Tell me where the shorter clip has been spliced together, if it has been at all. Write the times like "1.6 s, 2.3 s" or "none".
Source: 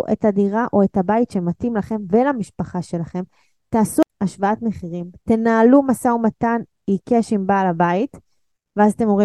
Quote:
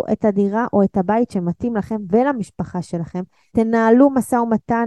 3.5 s